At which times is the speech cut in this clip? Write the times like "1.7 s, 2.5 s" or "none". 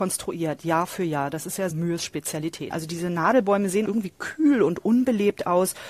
1.7 s, 2.7 s, 3.9 s